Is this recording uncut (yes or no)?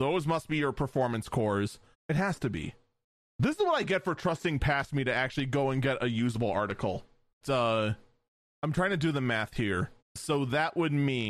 no